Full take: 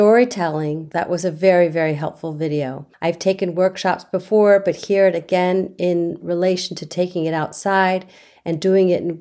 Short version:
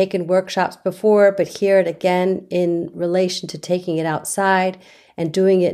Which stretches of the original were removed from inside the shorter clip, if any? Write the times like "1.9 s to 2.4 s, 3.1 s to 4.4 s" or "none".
none